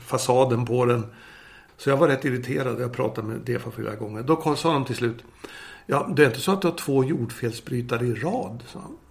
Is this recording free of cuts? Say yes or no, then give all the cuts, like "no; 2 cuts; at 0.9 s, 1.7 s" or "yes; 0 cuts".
no; 1 cut; at 1.7 s